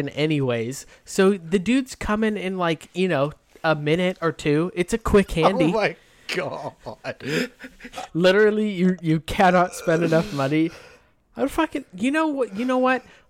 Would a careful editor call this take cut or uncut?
cut